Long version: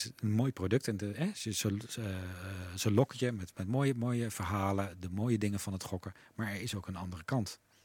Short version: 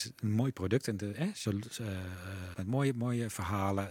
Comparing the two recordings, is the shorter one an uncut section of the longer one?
no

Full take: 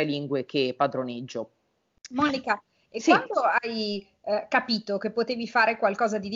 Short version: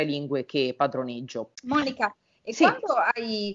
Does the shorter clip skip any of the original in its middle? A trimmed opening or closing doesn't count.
yes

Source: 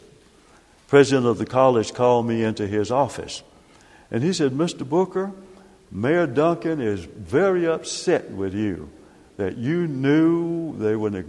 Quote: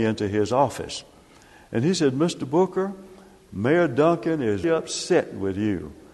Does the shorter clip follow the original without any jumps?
no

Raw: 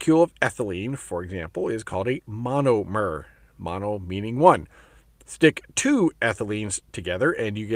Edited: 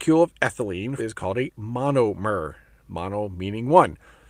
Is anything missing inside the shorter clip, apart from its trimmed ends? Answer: yes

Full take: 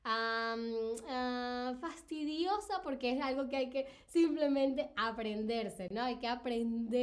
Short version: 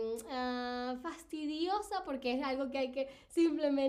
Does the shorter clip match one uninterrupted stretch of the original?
yes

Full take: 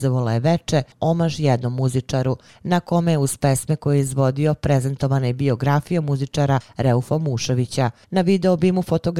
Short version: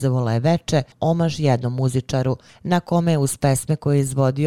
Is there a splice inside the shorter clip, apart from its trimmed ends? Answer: no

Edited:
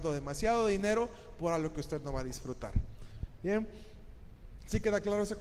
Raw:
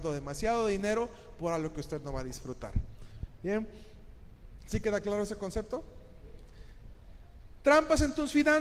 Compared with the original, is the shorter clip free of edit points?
yes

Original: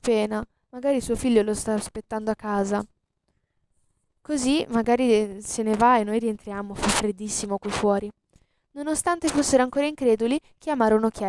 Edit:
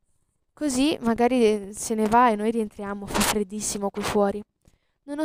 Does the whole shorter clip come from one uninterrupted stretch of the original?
yes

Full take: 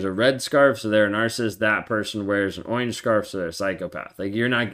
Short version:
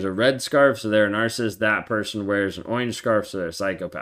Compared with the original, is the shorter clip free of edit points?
yes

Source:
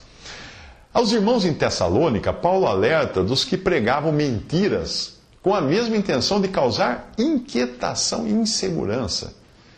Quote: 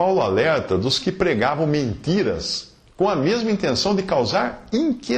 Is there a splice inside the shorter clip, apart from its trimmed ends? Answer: no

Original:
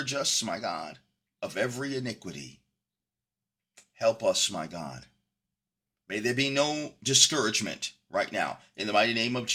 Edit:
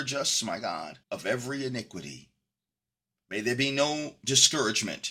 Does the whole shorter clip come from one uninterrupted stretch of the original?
no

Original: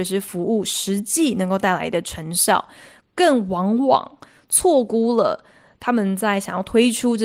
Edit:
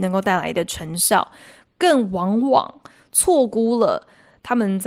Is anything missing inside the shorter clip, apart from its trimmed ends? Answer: no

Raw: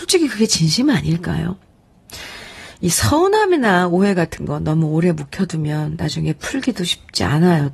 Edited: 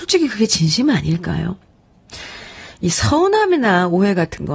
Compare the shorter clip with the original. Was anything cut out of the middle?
no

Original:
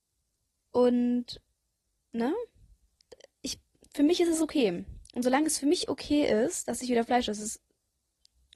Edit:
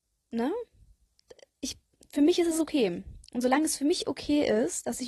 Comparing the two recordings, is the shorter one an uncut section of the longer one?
yes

